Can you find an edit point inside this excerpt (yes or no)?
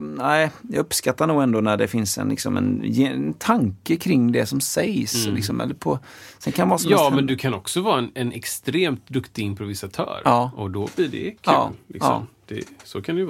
no